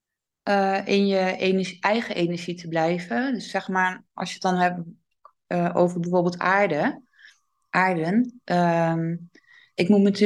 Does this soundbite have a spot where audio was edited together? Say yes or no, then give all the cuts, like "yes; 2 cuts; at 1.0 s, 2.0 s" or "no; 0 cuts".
no; 0 cuts